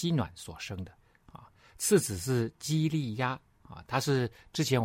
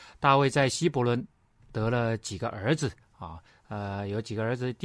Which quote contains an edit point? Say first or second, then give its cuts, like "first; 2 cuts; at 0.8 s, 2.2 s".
second; 1 cut; at 3.5 s